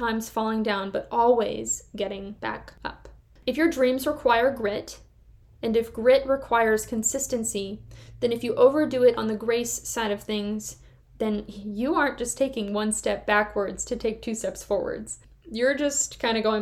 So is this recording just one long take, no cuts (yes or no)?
yes